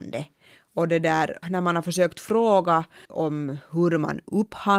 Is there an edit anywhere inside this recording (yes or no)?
yes